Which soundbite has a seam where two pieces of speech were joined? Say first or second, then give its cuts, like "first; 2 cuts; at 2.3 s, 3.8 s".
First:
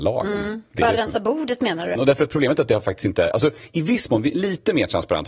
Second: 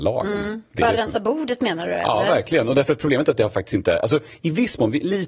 first; 1 cut; at 2.0 s